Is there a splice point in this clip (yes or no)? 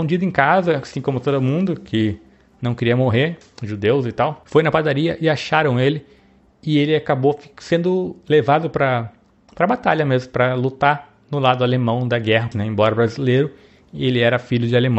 yes